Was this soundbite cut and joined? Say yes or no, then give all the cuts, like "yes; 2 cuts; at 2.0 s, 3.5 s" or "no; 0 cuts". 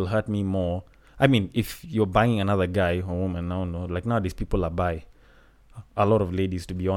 no; 0 cuts